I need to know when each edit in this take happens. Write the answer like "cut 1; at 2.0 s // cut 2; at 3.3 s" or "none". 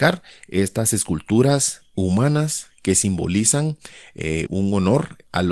cut 1; at 4.5 s

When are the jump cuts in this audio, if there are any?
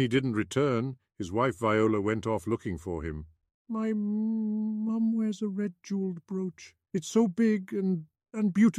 none

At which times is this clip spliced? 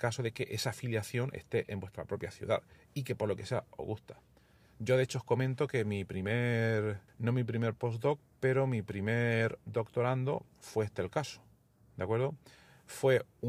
cut 1; at 7.1 s

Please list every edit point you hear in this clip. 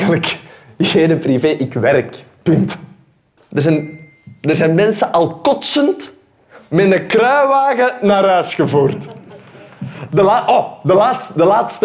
cut 1; at 3.4 s

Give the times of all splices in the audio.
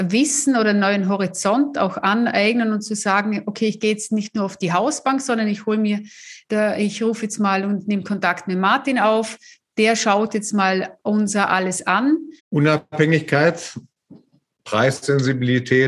cut 1; at 4.6 s // cut 2; at 12.4 s

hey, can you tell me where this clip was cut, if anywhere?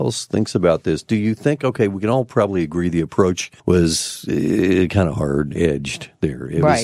cut 1; at 3.6 s

